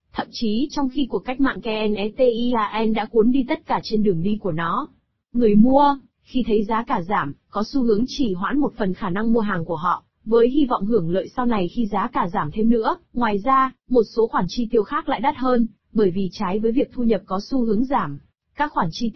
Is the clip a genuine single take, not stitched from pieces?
no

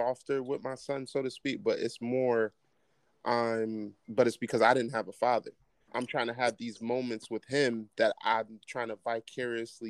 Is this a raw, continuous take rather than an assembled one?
no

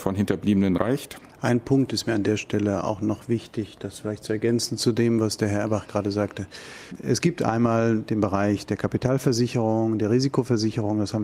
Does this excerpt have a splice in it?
no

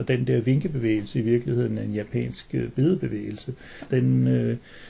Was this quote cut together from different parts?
yes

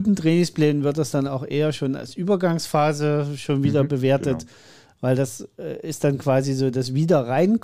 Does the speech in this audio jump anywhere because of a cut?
no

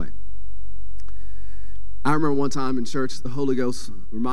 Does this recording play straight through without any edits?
yes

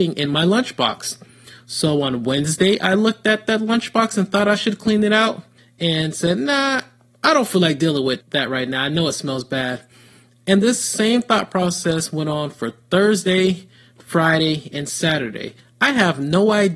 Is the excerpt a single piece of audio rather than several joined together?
yes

